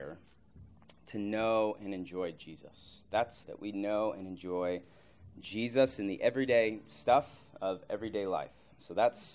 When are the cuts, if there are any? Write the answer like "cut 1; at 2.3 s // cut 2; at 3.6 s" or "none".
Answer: cut 1; at 3.4 s